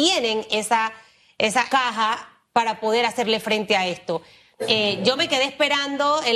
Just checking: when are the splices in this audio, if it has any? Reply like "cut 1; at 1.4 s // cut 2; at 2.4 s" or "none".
cut 1; at 1.7 s // cut 2; at 4.5 s

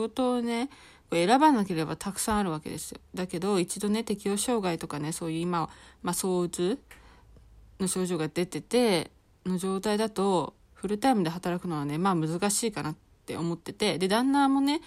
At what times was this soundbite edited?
none

